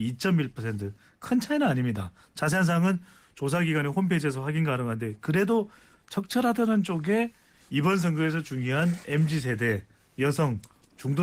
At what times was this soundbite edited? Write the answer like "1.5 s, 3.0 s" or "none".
none

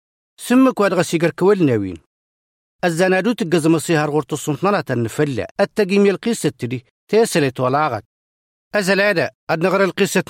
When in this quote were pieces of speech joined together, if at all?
5.5 s

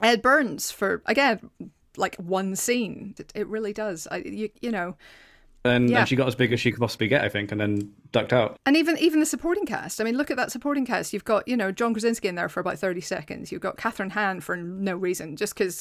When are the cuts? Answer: 3.2 s, 5.6 s

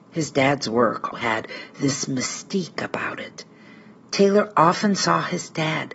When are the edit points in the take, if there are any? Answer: 1.1 s

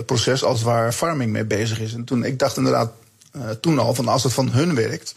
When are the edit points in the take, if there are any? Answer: none

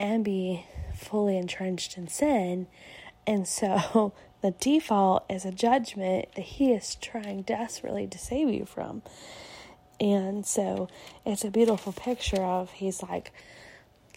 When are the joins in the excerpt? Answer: 9.9 s

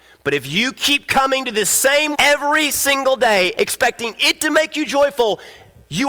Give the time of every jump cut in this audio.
2.1 s, 3.6 s

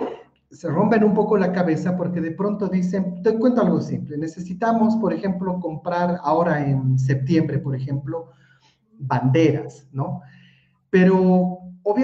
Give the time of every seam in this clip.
none

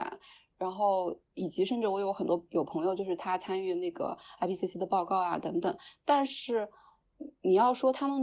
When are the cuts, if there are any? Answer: none

